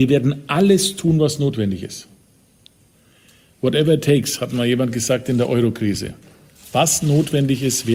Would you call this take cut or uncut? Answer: uncut